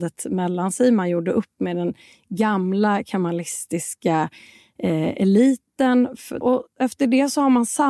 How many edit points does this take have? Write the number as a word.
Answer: one